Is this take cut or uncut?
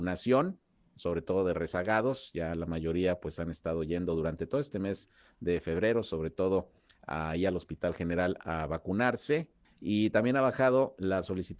cut